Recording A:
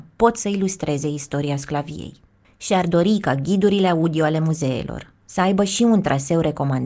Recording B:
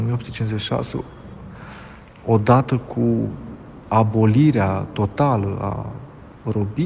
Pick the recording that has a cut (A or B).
A